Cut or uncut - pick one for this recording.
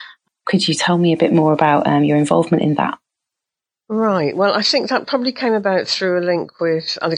uncut